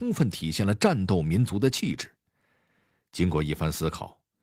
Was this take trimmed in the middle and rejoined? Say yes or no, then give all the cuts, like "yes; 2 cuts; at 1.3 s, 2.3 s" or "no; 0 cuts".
no; 0 cuts